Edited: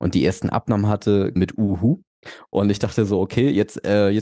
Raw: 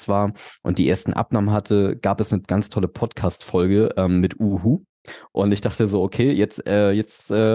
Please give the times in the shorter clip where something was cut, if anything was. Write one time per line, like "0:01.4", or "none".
0:01.4